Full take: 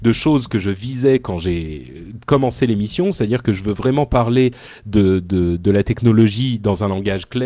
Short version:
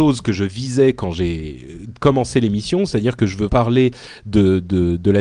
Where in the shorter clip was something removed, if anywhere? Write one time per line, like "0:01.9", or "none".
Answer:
0:03.5